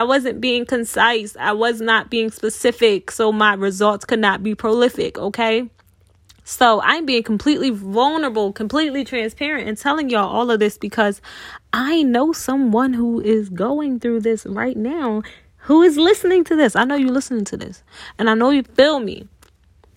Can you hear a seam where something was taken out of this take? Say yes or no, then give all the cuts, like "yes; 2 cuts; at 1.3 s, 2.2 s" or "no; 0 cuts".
no; 0 cuts